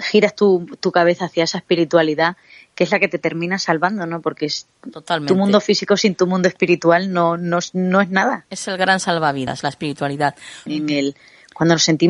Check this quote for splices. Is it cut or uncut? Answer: cut